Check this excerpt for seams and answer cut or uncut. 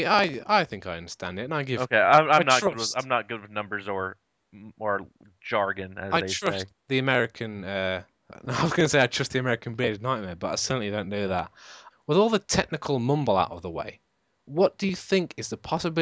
cut